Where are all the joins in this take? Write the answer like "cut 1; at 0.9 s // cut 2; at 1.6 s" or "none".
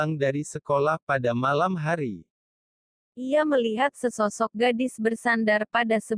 none